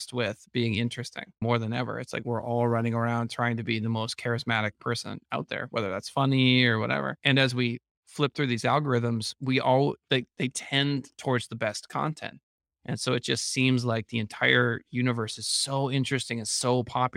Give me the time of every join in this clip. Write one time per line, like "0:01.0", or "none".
none